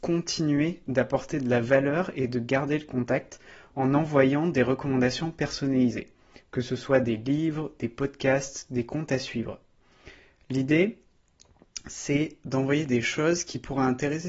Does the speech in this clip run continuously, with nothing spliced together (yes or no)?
yes